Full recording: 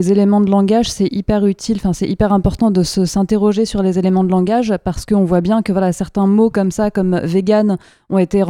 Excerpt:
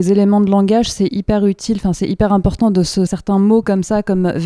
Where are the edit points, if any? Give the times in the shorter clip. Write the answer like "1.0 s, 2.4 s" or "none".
3.1 s